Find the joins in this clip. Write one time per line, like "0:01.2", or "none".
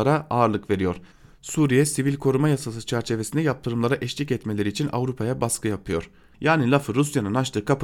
0:06.3